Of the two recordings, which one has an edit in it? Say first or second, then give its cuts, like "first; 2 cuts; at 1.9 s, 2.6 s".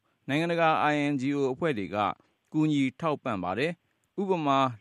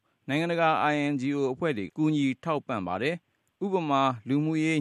second; 1 cut; at 1.9 s